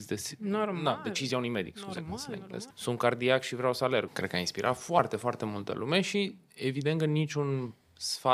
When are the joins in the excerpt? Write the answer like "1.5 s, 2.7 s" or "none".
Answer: 2.7 s, 4.1 s